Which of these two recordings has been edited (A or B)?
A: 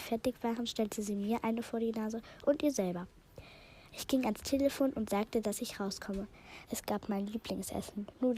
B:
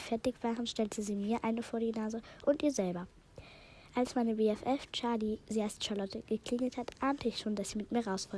A